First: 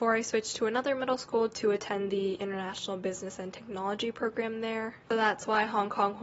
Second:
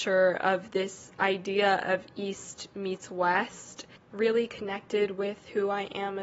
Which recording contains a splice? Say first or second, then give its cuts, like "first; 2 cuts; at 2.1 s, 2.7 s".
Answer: first; 1 cut; at 5.1 s